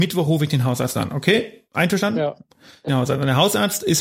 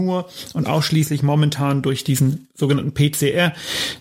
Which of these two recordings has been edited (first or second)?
first